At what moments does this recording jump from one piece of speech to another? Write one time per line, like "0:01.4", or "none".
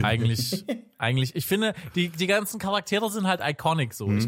none

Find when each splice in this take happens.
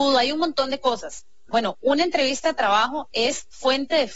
0:01.5

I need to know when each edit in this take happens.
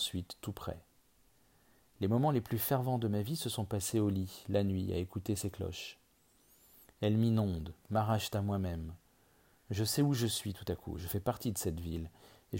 none

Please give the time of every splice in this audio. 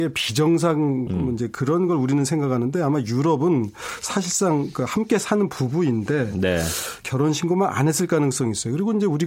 0:01.1

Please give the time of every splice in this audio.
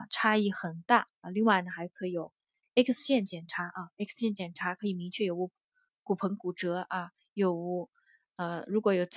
0:01.2

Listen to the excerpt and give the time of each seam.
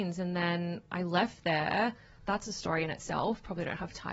none

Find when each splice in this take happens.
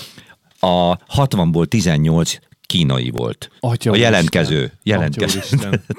0:03.6

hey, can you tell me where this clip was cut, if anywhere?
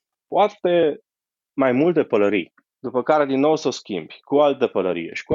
0:02.6

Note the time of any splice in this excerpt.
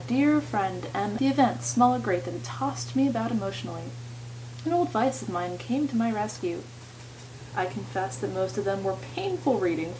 0:01.2
0:07.5

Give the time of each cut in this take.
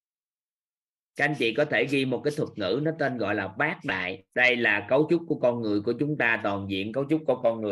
0:04.3

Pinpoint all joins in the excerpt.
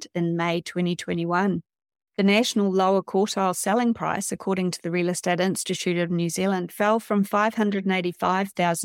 0:01.9

